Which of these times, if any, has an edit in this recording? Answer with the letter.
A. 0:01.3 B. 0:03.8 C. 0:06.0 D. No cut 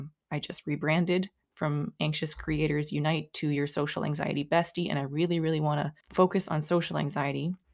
C